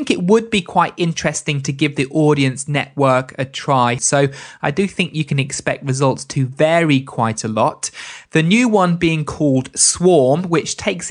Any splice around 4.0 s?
yes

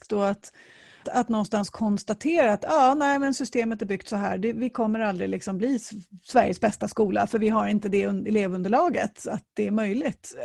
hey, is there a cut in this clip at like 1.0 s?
yes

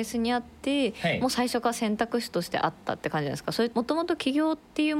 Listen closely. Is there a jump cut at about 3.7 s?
yes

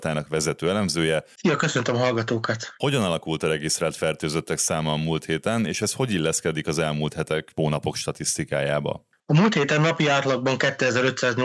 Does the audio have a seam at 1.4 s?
yes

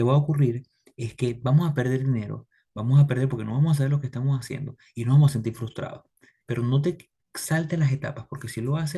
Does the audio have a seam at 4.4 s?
no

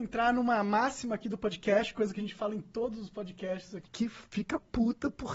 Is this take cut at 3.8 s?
yes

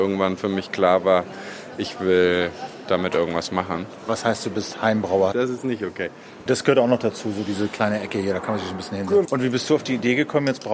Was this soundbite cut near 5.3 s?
yes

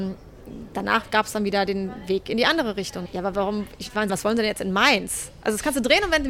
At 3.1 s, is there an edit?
yes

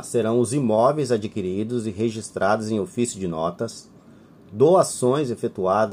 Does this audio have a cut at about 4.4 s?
no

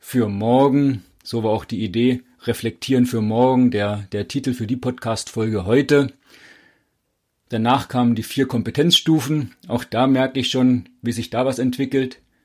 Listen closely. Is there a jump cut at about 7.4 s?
yes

